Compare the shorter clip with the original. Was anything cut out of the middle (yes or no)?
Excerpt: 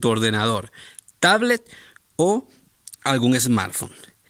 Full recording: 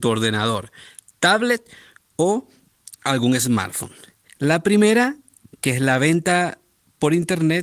no